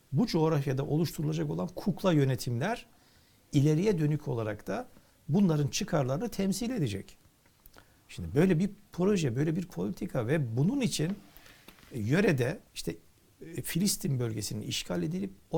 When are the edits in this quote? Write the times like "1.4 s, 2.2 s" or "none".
12.7 s